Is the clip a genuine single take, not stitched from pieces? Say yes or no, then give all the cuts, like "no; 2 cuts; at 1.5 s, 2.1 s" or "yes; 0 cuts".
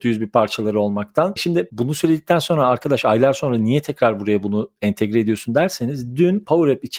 yes; 0 cuts